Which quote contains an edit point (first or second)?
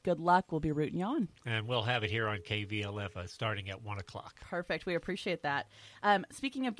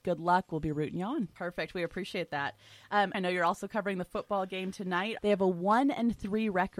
second